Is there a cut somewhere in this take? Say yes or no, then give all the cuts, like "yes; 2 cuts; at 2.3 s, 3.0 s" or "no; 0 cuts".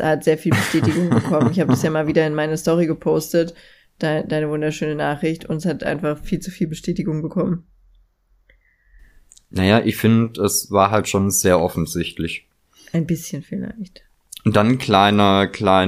no; 0 cuts